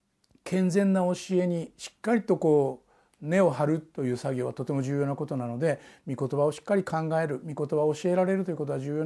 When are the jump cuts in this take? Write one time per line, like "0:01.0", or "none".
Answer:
none